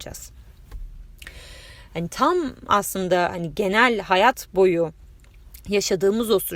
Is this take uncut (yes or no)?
no